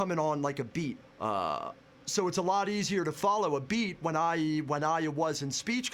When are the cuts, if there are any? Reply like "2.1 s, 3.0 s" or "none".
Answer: 1.0 s

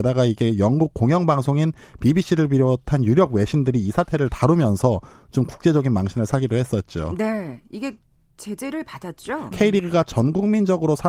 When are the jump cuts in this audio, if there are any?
9.5 s

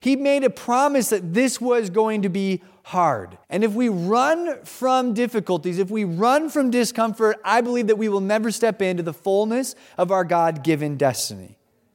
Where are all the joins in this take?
3.4 s

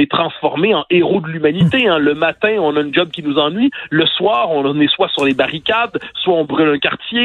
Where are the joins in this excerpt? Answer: none

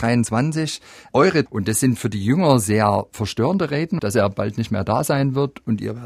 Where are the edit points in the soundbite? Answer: 1.5 s, 4.0 s

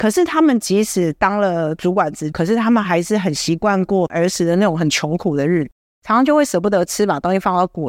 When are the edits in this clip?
2.3 s, 5.8 s

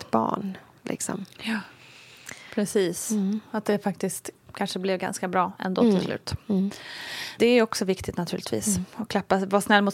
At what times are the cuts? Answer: none

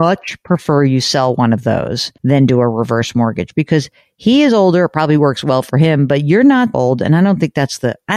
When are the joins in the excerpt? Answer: 2.2 s, 6.7 s

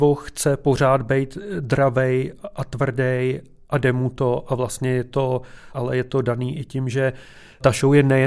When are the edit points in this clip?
5.7 s

